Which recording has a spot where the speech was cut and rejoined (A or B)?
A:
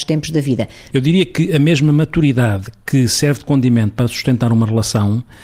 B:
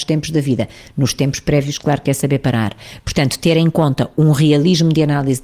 A